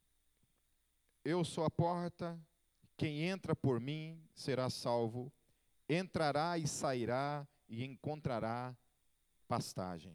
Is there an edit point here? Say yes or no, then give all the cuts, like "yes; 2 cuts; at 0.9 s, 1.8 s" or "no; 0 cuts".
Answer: no; 0 cuts